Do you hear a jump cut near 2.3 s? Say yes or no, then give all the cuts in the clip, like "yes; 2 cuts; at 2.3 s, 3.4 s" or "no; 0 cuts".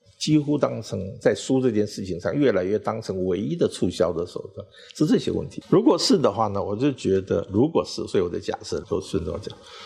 no; 2 cuts; at 5.6 s, 8.8 s